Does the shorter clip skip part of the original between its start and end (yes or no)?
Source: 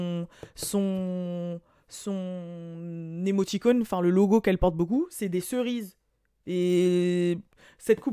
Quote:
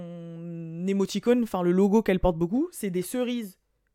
no